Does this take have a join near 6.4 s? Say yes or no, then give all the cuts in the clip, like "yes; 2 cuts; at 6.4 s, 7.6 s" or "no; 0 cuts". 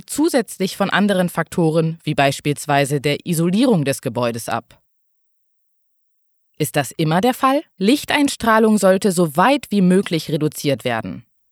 yes; 2 cuts; at 6.4 s, 7.7 s